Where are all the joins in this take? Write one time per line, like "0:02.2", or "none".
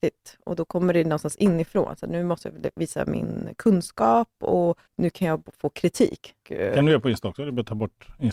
0:04.9
0:06.4